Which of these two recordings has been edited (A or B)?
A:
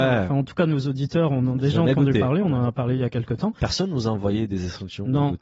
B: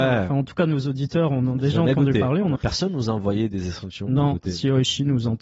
B